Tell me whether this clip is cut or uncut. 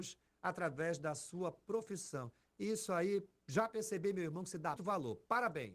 cut